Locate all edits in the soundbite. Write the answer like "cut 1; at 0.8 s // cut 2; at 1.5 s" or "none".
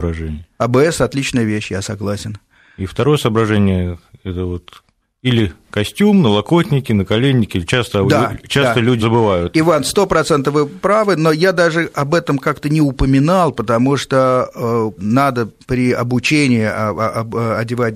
cut 1; at 9.0 s // cut 2; at 15.0 s